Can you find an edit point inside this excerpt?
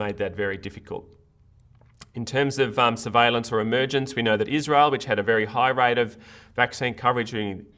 no; 0 cuts

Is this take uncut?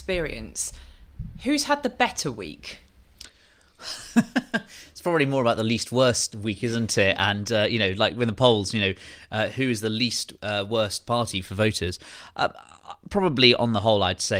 yes; 0 cuts

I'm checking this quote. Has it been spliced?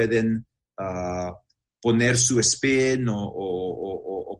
no; 0 cuts

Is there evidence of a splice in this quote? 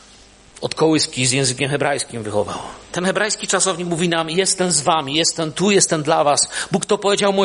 yes; 1 cut; at 2.8 s

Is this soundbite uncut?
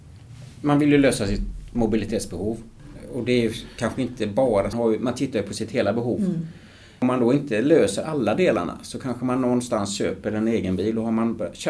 no; 1 cut; at 4.7 s

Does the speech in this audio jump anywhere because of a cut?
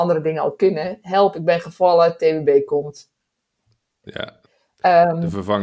no; 0 cuts

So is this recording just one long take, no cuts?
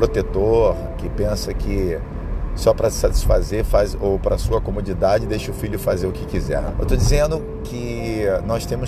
no; 2 cuts; at 0.9 s, 6.7 s

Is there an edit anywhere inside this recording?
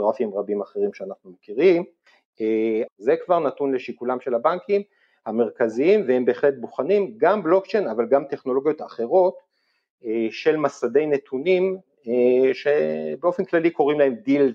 yes; 1 cut; at 2.9 s

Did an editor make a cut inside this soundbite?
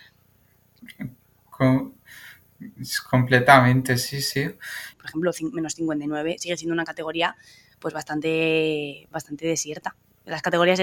yes; 1 cut; at 4.9 s

